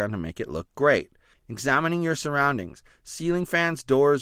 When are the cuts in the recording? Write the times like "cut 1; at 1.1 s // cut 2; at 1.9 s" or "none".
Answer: cut 1; at 1.3 s